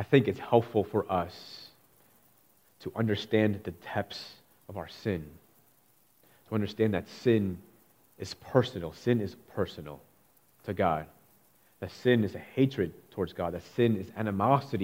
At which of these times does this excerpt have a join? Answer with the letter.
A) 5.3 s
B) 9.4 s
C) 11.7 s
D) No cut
B